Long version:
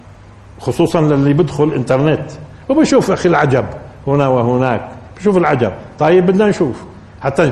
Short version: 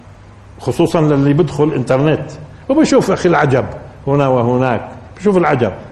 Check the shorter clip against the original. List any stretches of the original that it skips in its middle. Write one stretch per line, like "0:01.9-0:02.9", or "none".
none